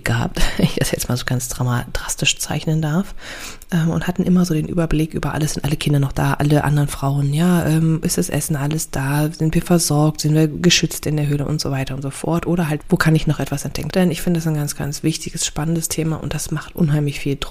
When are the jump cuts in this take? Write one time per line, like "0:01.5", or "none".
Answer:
0:12.8
0:13.9